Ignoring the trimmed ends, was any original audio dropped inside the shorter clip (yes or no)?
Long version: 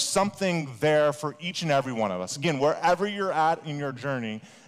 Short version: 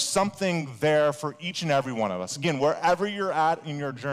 no